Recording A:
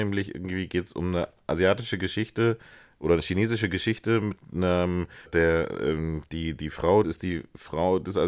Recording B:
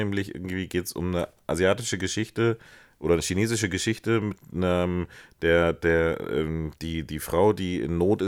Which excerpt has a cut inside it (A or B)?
A